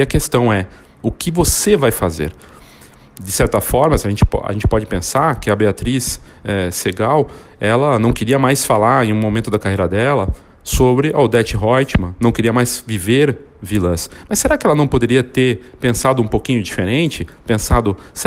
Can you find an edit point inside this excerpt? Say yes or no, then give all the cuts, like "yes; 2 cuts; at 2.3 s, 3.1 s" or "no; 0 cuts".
no; 0 cuts